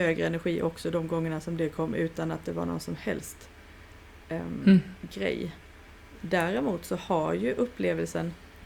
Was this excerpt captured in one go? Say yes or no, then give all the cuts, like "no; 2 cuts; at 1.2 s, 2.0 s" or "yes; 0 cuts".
no; 1 cut; at 6.1 s